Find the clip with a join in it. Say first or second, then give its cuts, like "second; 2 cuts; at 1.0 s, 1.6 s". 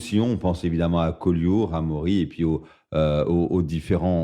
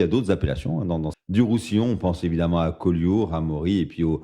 second; 1 cut; at 1.1 s